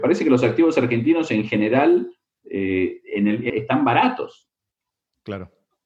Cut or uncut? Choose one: cut